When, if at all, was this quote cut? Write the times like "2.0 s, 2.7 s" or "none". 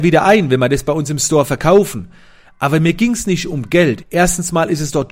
4.0 s